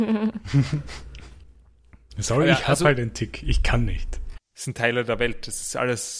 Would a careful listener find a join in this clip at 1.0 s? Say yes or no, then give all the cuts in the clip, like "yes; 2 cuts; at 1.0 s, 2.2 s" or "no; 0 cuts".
no; 1 cut; at 4.3 s